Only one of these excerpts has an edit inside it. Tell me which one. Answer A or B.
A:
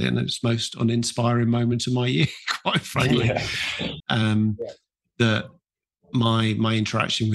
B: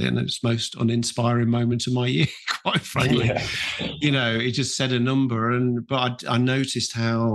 A